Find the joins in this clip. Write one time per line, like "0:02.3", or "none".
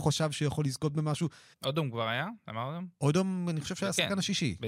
0:01.5